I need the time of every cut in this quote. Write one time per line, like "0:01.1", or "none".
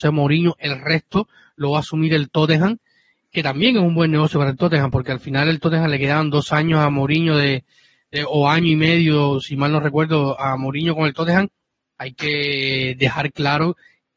0:12.0